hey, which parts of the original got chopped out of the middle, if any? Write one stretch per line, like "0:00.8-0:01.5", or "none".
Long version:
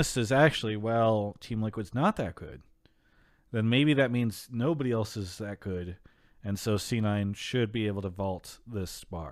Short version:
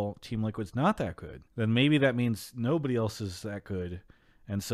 0:02.7-0:03.4